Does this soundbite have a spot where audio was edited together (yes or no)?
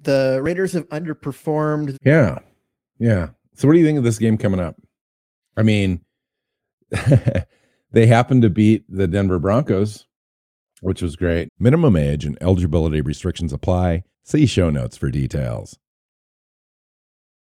yes